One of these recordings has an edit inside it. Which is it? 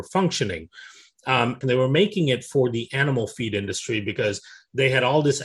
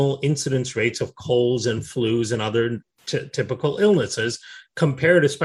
first; 1 cut; at 1.6 s

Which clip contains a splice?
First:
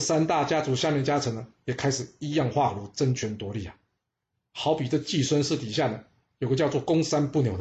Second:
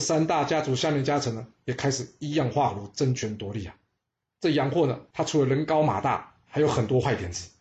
second; 1 cut; at 4.3 s

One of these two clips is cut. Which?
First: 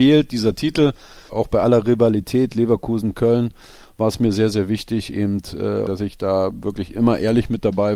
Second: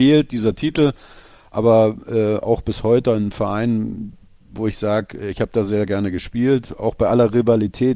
first; 2 cuts; at 1.3 s, 5.9 s

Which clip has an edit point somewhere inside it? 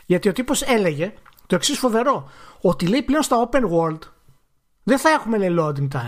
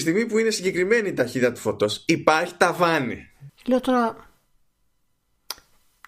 second; 1 cut; at 3.5 s

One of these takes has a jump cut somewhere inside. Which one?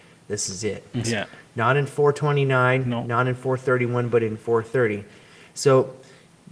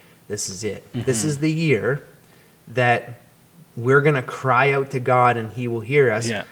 first; 1 cut; at 1.0 s

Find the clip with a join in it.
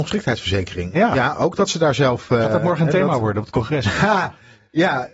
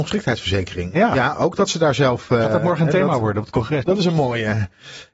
second; 1 cut; at 3.8 s

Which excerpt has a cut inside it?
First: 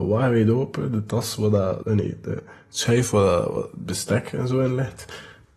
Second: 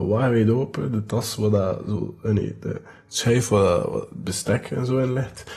first; 1 cut; at 1.8 s

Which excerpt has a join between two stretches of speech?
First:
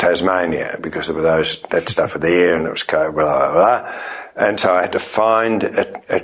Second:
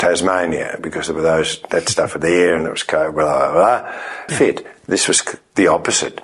second; 1 cut; at 4.3 s

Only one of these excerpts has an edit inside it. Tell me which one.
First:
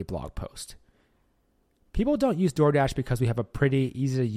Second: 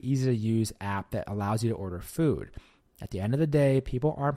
second; 1 cut; at 2.9 s

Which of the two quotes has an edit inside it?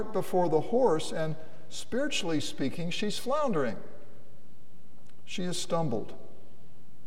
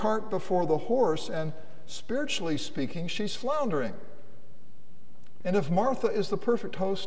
second; 1 cut; at 5.4 s

